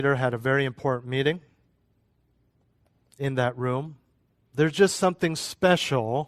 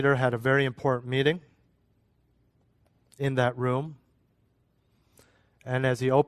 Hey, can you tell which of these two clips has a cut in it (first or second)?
first